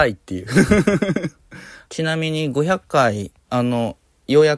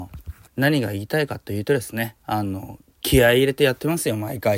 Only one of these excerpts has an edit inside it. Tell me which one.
first; 1 cut; at 1.9 s

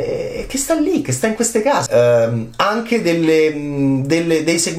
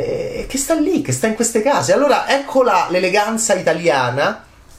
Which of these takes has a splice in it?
first; 1 cut; at 1.9 s

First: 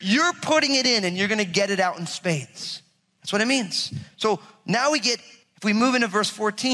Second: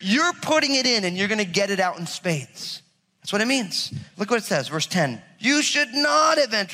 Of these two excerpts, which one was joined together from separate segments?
second; 2 cuts; at 4.1 s, 5.4 s

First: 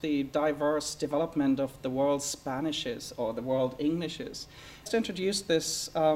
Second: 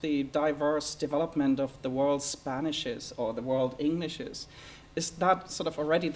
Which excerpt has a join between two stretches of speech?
first; 1 cut; at 4.9 s

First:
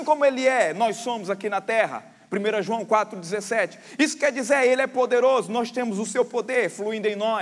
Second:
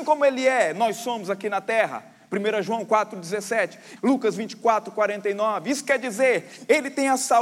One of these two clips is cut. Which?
second; 1 cut; at 4.0 s

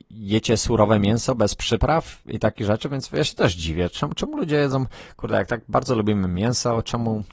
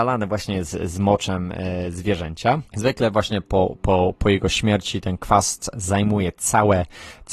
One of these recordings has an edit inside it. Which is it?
second; 1 cut; at 2.7 s

